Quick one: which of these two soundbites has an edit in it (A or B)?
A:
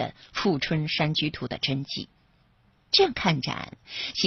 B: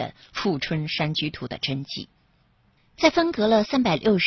B